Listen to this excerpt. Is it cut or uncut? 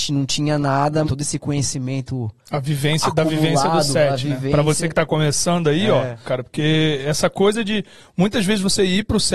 cut